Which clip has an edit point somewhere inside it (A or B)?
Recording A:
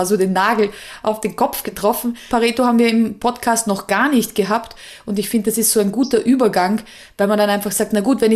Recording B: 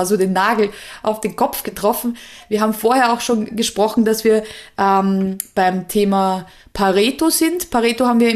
A